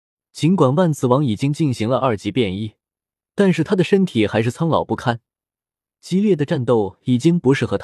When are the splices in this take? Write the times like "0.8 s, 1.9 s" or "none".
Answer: none